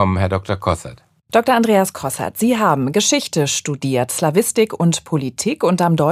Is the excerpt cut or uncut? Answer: cut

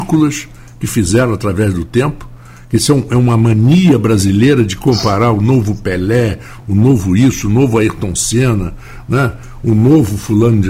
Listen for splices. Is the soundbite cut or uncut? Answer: uncut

